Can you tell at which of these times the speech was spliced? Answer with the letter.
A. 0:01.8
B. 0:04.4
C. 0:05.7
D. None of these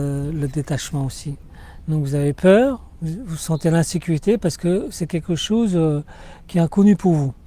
A